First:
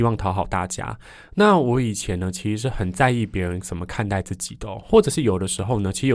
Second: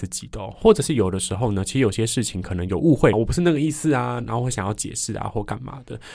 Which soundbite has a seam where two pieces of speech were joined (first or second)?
second